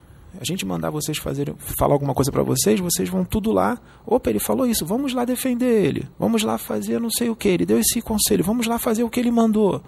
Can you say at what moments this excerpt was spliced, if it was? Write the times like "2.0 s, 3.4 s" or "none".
6.1 s